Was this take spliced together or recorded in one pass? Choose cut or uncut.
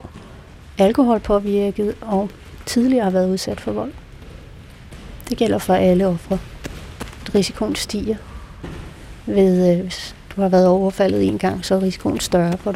uncut